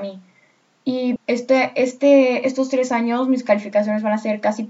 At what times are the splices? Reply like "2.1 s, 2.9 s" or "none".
1.2 s